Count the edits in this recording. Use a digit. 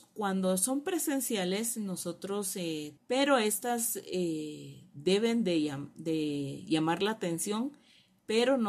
1